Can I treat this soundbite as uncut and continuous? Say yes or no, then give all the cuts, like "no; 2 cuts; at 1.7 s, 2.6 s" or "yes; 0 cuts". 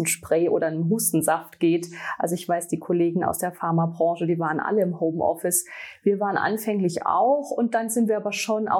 yes; 0 cuts